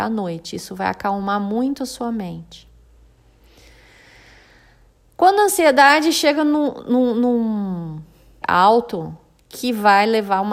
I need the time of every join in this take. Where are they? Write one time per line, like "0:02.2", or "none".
0:08.4